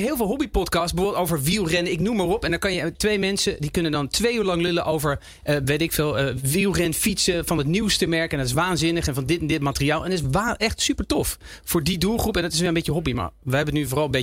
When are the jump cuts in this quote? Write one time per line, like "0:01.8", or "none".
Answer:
none